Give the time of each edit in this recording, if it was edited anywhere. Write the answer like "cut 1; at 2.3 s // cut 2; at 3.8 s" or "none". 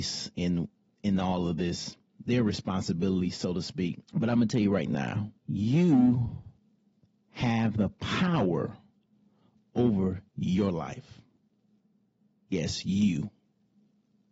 cut 1; at 4.0 s // cut 2; at 5.4 s